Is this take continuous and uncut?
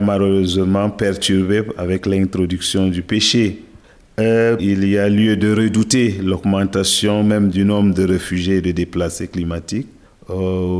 no; 1 cut; at 4.6 s

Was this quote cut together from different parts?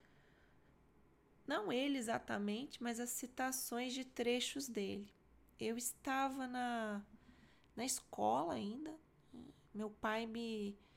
no; 0 cuts

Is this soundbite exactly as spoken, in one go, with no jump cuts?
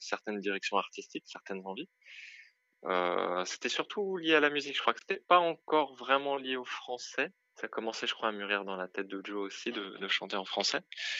no; 1 cut; at 7.5 s

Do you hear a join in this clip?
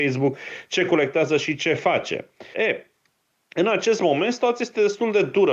yes; 1 cut; at 2.5 s

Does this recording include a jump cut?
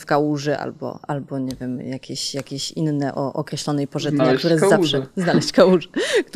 no; 0 cuts

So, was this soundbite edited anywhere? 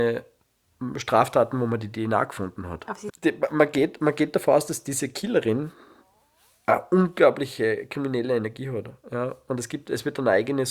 yes; 1 cut; at 3.1 s

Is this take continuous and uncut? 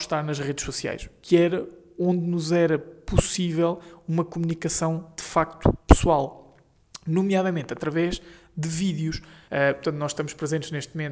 no; 1 cut; at 9.5 s

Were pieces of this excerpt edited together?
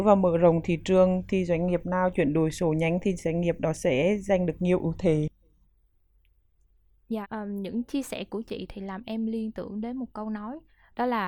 yes; 1 cut; at 7.2 s

